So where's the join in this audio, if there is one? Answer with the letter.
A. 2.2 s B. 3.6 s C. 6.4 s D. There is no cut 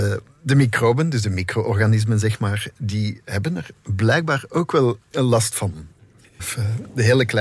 C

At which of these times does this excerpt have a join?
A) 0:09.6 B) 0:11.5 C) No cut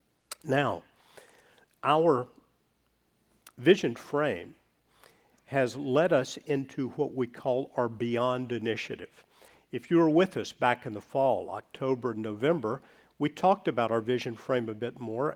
C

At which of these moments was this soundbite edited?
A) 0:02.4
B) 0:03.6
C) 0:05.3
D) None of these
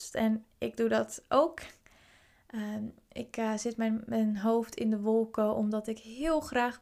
D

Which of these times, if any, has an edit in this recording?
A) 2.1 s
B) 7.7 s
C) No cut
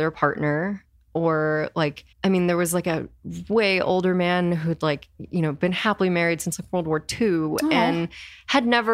A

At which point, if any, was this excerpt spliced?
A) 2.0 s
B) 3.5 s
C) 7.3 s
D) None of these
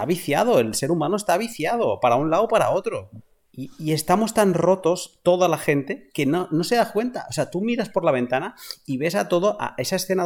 B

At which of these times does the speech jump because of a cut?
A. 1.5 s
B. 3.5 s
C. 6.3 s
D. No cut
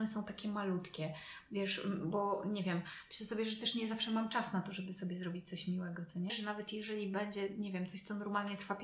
C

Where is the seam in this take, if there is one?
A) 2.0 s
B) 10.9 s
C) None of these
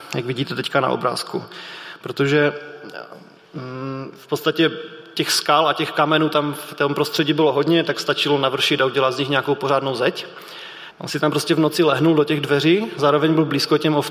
B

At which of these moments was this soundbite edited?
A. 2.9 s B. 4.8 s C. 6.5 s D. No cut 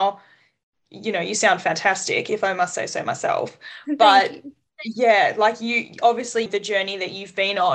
C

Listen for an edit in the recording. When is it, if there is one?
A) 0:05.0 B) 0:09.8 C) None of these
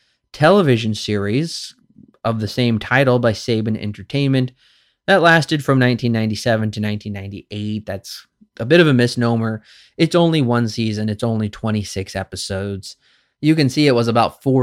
C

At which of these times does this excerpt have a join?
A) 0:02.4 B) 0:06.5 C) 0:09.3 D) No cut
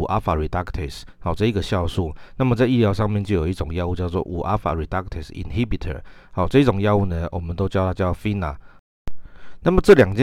D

